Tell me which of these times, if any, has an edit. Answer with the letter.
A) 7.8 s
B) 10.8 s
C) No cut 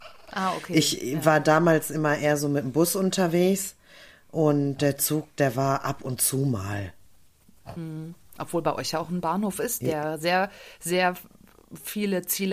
C